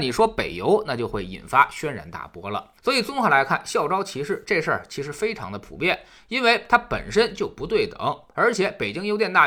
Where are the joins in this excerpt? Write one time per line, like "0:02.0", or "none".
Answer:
0:02.8